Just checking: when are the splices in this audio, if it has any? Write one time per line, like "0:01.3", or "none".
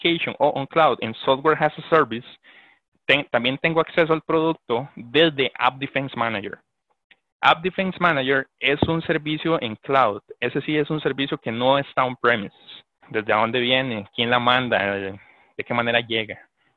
0:13.0

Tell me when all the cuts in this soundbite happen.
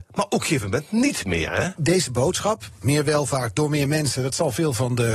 0:01.8

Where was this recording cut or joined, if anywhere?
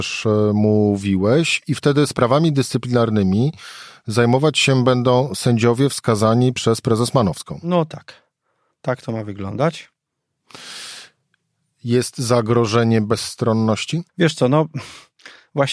0:14.1

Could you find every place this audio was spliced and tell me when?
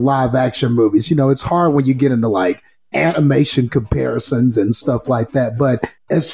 none

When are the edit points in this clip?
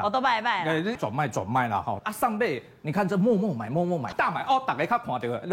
0:01.0
0:02.0
0:04.1

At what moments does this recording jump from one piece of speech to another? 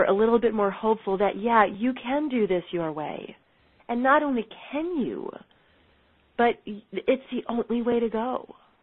0:03.8
0:06.6

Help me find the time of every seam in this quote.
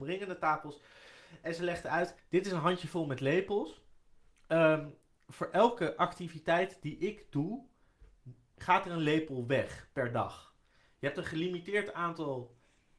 0:02.2

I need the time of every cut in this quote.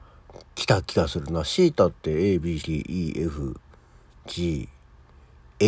0:02.6

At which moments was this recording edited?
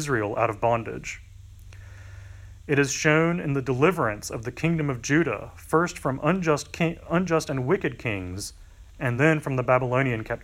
none

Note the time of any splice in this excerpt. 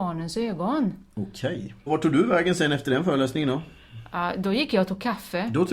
0:01.9

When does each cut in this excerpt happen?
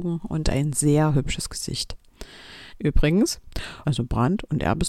0:02.7
0:03.8

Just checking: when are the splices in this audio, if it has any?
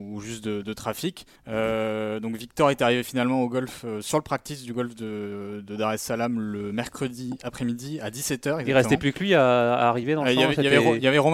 0:01.4

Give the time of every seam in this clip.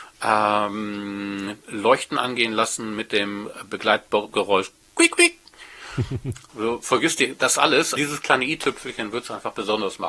0:06.5
0:08.0

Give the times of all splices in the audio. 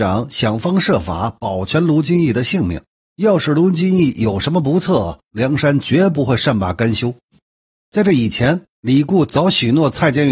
0:03.0

